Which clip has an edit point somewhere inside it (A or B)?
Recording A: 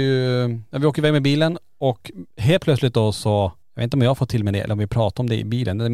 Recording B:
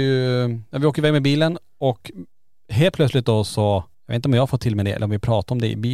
A